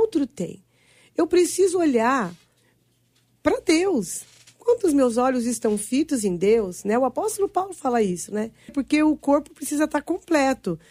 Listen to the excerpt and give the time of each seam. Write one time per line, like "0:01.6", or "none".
0:08.7